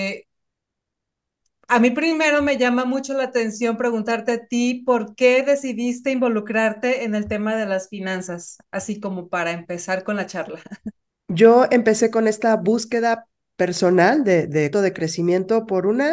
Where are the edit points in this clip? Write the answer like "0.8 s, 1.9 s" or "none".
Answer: 11.1 s, 14.7 s